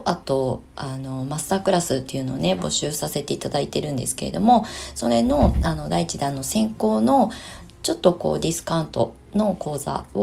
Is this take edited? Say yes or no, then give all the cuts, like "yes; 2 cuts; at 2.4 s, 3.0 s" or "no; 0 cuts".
no; 0 cuts